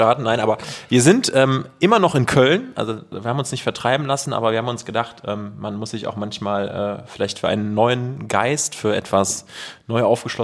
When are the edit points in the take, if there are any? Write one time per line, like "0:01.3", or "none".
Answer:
none